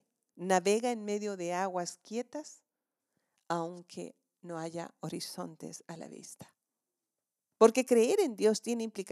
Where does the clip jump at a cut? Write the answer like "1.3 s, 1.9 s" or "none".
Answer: 7.5 s